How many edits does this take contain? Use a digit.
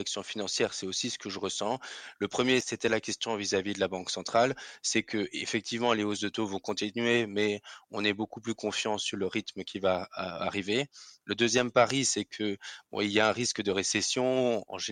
0